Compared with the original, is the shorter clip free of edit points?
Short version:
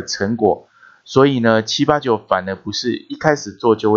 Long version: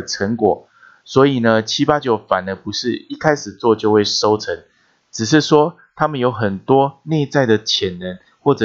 yes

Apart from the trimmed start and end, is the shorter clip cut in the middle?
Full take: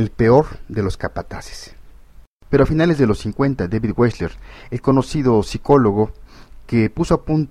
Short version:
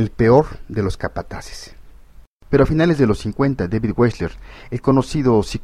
no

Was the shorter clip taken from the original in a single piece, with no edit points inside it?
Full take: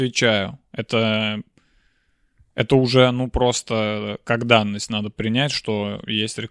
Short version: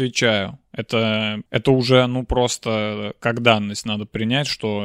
no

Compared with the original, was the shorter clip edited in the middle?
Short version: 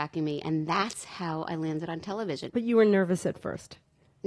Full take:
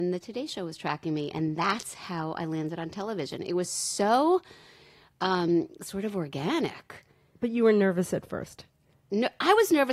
yes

